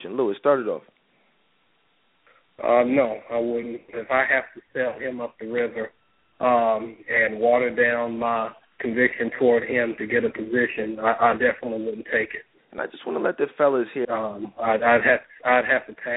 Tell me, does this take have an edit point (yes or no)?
yes